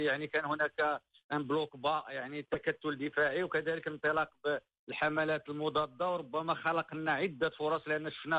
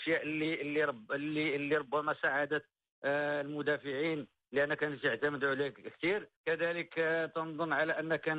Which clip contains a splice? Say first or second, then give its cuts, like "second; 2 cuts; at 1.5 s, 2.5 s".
second; 1 cut; at 6.4 s